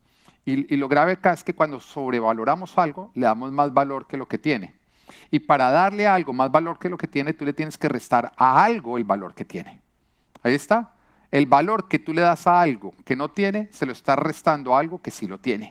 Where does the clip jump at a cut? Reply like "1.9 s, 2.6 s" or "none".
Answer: none